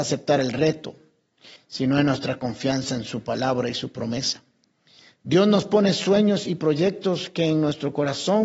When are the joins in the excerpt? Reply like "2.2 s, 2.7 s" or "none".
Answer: 1.6 s